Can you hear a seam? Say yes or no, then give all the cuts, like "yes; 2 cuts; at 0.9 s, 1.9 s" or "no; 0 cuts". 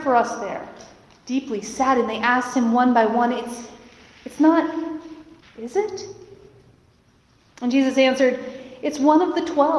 yes; 2 cuts; at 1.1 s, 5.4 s